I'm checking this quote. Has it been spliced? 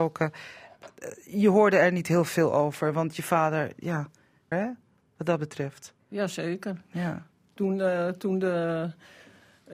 yes; 1 cut; at 4.5 s

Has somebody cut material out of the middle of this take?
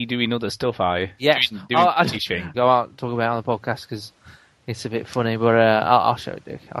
yes; 1 cut; at 2.5 s

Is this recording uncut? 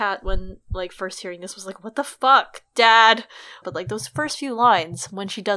no; 1 cut; at 3.6 s

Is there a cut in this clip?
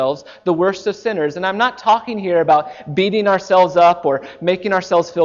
no; 0 cuts

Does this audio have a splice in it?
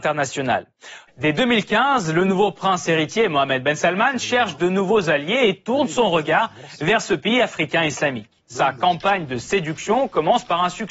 yes; 1 cut; at 1.1 s

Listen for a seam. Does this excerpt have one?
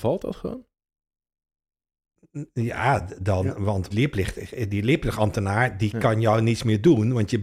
yes; 1 cut; at 3.9 s

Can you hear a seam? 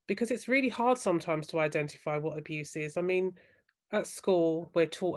no; 0 cuts

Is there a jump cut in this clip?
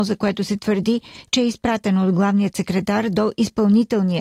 no; 0 cuts

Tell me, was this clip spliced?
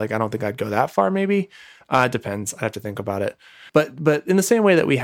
no; 0 cuts

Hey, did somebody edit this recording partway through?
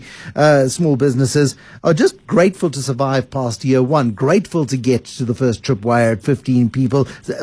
no; 0 cuts

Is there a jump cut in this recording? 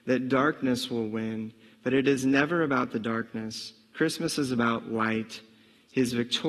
no; 0 cuts

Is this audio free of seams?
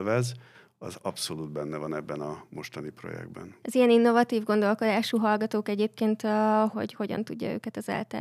no; 2 cuts; at 3.6 s, 6.7 s

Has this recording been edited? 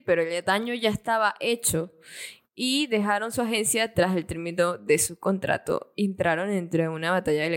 no; 0 cuts

